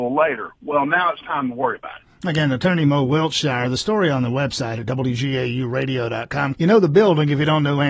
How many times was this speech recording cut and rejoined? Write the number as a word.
one